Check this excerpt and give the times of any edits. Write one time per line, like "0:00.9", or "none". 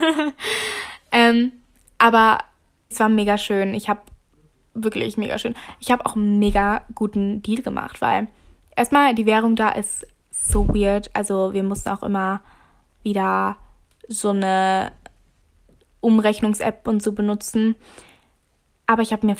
0:02.9